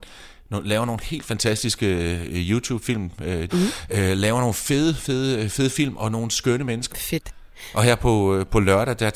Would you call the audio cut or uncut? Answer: cut